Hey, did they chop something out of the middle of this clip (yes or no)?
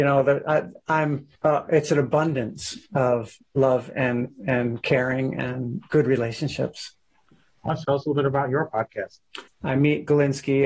yes